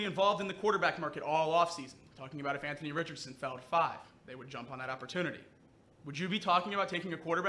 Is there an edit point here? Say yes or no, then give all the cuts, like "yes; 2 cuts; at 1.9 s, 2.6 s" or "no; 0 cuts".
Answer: no; 0 cuts